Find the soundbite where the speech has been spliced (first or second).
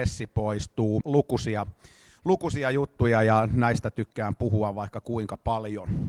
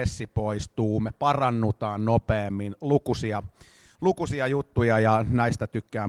first